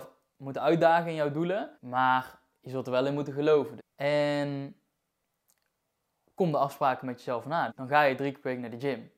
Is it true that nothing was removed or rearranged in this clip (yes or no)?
no